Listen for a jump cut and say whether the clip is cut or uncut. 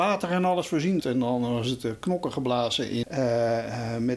cut